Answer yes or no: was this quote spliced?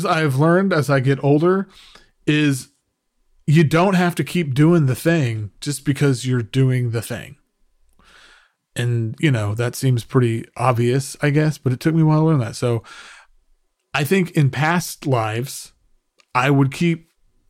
no